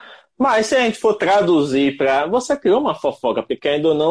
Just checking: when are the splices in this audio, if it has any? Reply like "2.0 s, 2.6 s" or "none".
none